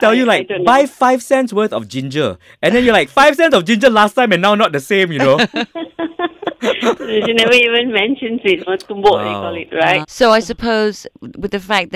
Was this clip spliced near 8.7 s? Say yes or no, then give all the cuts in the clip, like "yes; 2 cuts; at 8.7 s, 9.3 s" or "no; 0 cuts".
yes; 2 cuts; at 8.7 s, 10.0 s